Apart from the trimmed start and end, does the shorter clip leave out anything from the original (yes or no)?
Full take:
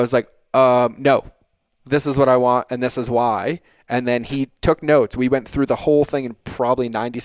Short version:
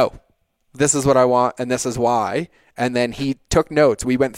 no